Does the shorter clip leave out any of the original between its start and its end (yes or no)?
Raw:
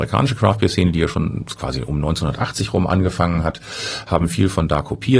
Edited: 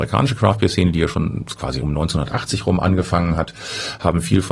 yes